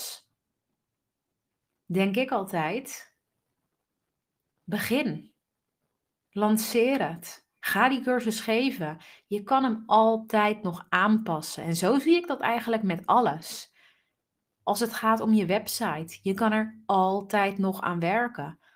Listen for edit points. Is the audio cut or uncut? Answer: uncut